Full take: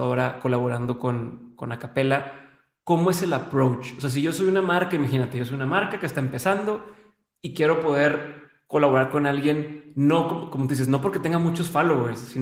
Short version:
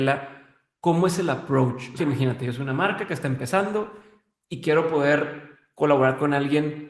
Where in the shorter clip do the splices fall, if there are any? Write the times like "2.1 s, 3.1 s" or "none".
2.0 s